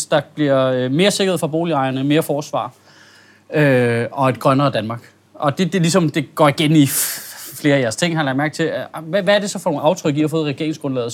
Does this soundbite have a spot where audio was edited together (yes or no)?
no